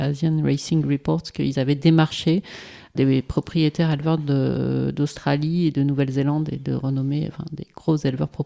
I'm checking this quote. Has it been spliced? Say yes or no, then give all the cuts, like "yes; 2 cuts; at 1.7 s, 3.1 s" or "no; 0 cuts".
yes; 1 cut; at 2.9 s